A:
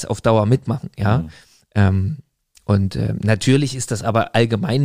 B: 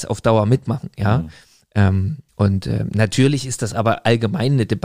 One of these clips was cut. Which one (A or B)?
B